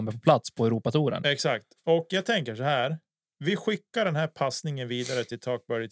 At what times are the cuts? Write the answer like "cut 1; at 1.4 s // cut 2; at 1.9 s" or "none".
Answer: none